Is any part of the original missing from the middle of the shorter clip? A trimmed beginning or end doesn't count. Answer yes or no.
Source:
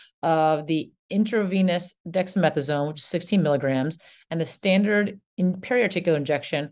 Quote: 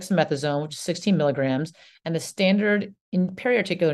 no